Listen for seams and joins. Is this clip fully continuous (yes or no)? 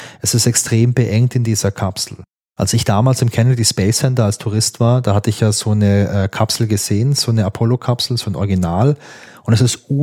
yes